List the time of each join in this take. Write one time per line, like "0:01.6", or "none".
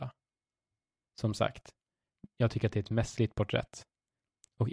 0:01.0